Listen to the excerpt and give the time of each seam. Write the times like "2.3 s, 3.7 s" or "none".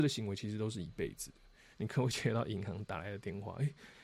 1.7 s